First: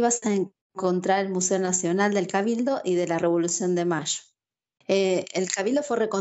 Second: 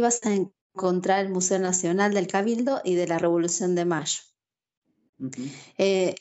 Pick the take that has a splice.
first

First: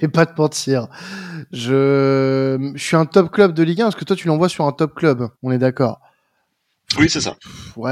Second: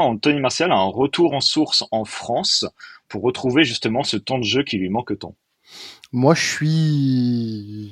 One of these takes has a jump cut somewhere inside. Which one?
first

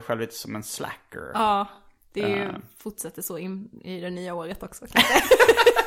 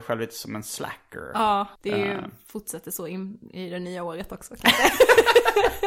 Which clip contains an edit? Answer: second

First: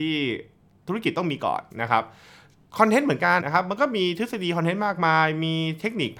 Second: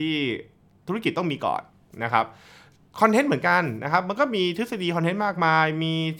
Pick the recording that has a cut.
first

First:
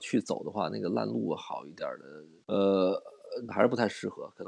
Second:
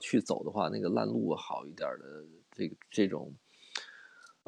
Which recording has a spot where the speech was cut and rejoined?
first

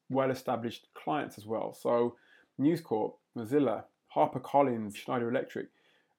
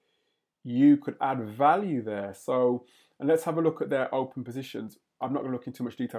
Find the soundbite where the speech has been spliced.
first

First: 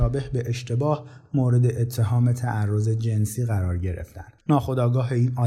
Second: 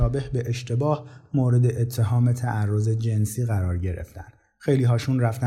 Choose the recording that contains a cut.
first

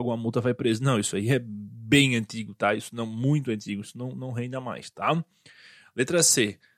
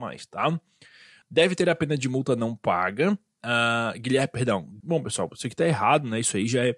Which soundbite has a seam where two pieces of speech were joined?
second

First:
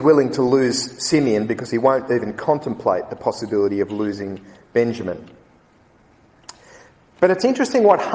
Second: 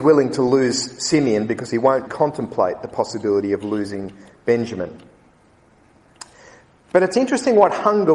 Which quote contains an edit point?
second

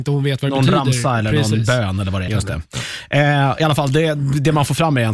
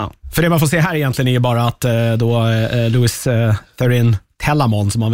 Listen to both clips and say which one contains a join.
first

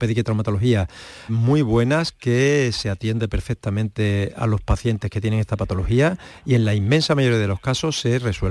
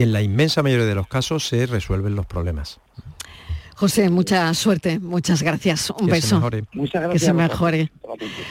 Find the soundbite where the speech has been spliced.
first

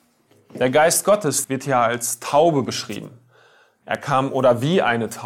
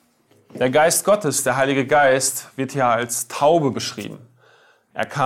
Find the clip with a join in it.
first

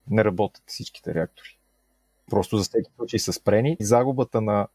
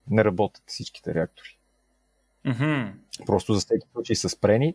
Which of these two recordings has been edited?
first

